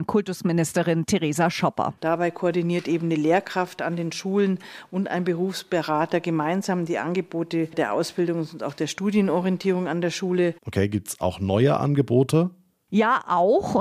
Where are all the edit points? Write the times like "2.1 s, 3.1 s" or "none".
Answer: 2.0 s, 10.6 s